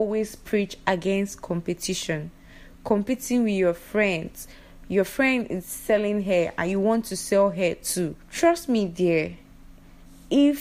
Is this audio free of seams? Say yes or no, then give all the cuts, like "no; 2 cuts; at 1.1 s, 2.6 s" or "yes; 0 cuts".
no; 1 cut; at 8.2 s